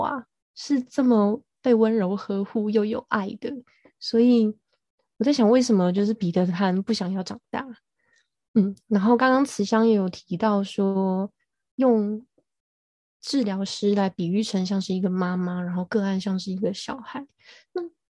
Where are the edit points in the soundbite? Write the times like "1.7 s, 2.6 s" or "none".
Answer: none